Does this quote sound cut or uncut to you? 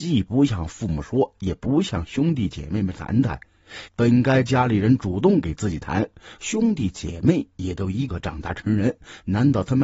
cut